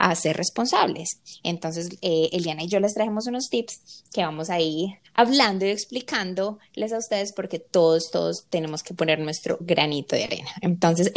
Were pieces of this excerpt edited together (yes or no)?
no